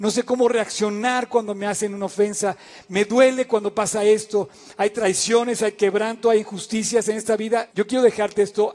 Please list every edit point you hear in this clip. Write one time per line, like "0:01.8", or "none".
0:07.7